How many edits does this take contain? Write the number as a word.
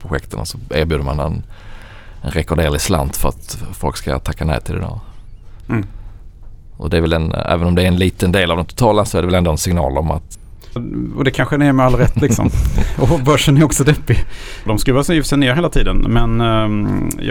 three